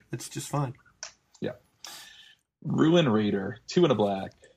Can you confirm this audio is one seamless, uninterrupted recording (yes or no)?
yes